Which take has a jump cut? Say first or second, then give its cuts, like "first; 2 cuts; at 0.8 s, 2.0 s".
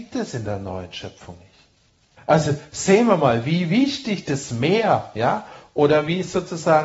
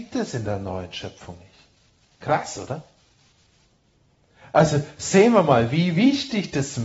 first; 1 cut; at 2.2 s